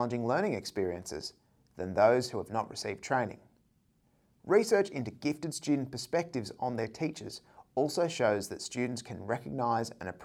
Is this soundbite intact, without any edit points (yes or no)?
yes